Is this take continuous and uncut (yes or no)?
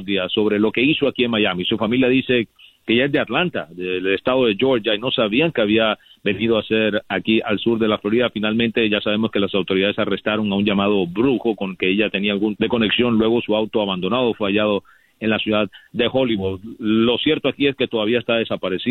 no